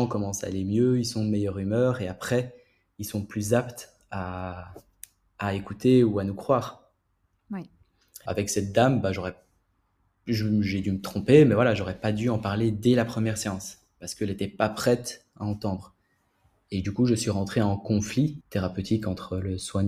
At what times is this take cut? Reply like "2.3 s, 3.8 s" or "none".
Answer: 8.3 s, 18.4 s